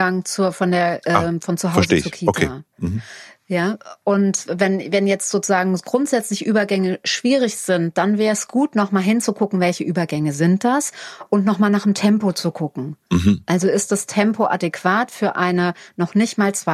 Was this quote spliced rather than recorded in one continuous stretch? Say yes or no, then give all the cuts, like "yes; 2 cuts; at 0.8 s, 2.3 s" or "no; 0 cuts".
no; 0 cuts